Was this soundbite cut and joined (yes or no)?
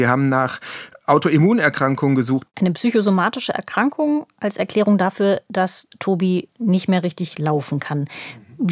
yes